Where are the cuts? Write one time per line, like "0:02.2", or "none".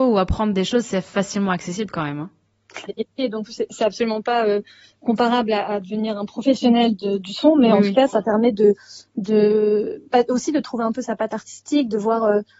0:02.9